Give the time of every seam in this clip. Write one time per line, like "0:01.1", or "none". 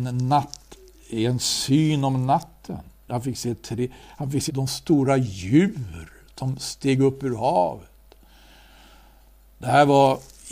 0:03.1
0:04.5